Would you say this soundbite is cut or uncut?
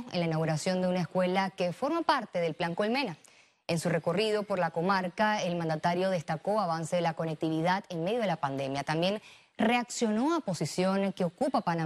uncut